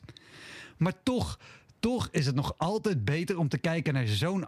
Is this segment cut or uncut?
uncut